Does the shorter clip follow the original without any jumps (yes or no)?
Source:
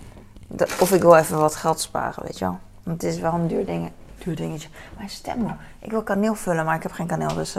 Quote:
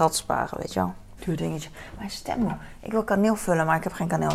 no